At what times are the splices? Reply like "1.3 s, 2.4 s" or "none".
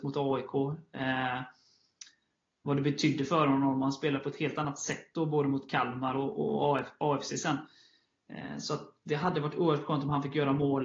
none